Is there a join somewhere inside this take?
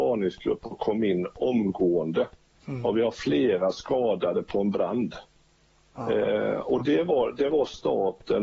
yes; 1 cut; at 2.5 s

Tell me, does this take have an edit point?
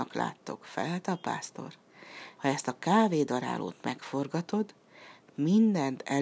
yes; 1 cut; at 2.4 s

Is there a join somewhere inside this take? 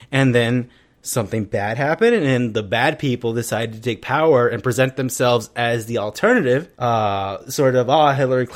yes; 1 cut; at 6.7 s

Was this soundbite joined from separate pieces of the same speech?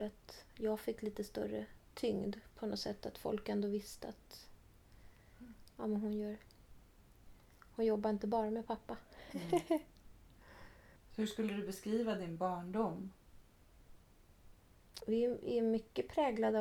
no; 0 cuts

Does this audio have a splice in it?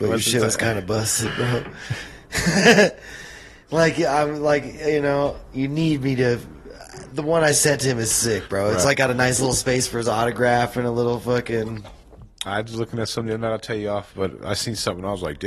yes; 1 cut; at 12.5 s

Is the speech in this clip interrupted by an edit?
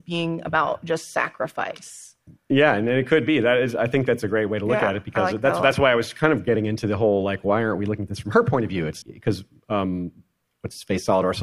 yes; 1 cut; at 9.0 s

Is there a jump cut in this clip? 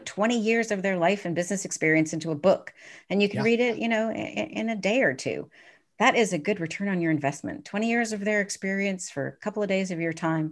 no; 0 cuts

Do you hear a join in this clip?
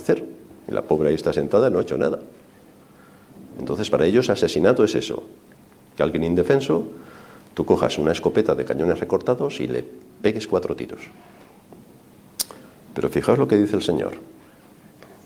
no; 0 cuts

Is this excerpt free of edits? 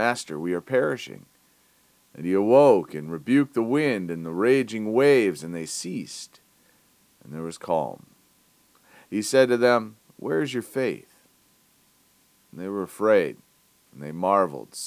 yes; 0 cuts

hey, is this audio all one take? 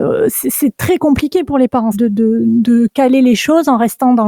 no; 1 cut; at 1.9 s

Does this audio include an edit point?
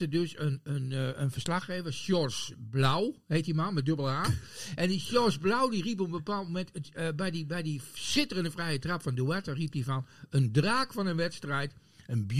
no; 0 cuts

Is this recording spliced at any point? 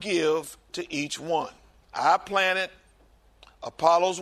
no; 0 cuts

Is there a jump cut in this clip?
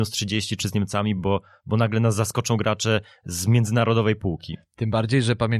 no; 0 cuts

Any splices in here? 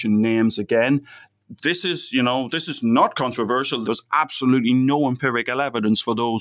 yes; 2 cuts; at 1.6 s, 3.8 s

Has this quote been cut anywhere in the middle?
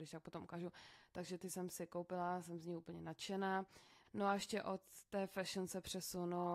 yes; 1 cut; at 4.0 s

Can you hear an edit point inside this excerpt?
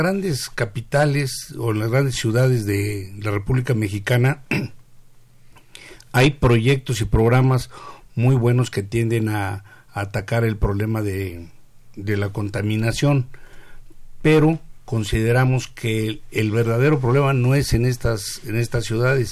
no; 0 cuts

